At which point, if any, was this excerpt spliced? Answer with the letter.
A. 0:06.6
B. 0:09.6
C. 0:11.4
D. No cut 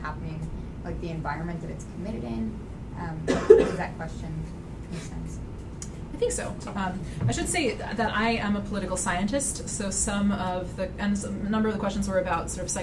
A